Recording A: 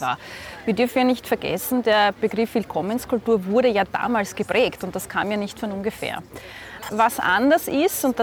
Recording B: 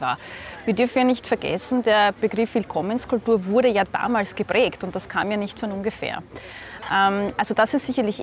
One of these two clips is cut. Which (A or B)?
A